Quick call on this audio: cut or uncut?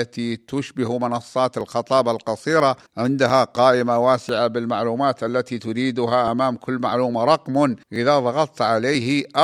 cut